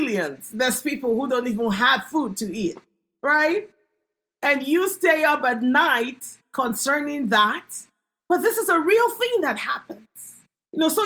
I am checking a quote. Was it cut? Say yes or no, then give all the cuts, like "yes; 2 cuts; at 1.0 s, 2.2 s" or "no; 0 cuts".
no; 0 cuts